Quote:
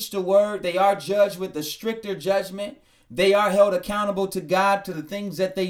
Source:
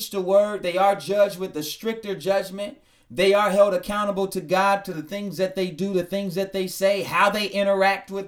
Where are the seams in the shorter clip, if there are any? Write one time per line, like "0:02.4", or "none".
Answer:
none